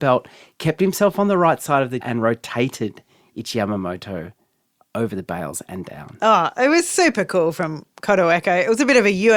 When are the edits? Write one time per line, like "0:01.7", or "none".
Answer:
0:02.0